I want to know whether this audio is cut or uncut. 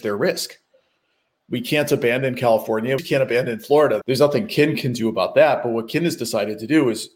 cut